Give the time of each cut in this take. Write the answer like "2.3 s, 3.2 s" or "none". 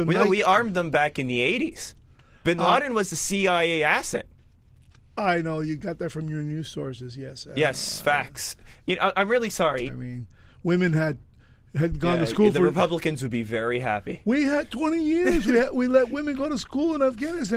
9.9 s